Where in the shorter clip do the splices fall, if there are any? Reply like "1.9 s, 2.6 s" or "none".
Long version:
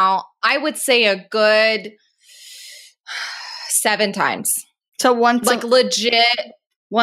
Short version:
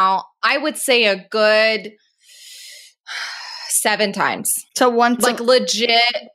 4.7 s

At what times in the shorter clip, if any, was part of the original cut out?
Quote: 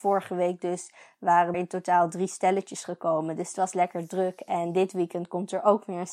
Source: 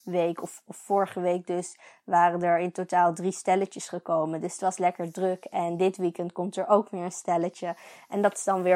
1.5 s

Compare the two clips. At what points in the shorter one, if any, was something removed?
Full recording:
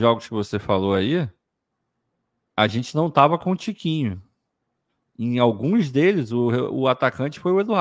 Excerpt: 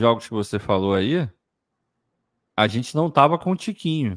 none

